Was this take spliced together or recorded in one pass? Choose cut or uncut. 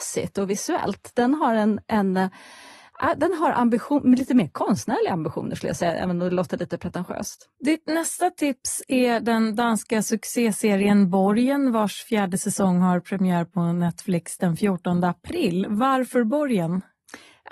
uncut